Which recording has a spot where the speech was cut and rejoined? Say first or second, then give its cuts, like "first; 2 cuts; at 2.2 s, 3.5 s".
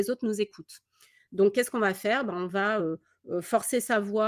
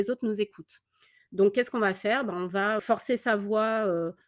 second; 1 cut; at 2.8 s